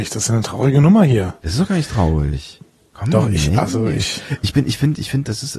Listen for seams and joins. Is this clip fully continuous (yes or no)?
yes